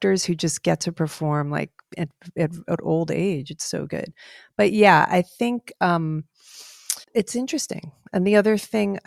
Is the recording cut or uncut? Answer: cut